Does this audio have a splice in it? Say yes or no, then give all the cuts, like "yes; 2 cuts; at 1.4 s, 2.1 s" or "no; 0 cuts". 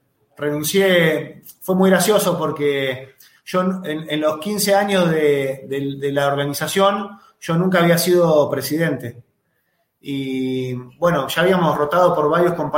no; 0 cuts